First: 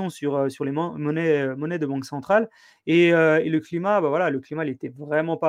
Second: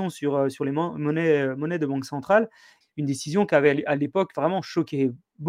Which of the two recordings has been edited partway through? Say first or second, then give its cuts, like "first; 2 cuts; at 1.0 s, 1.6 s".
second; 1 cut; at 2.8 s